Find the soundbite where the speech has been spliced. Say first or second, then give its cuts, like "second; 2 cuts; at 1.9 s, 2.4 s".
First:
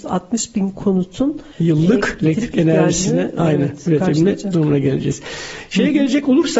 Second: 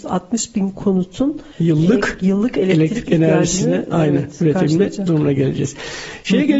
first; 1 cut; at 2.2 s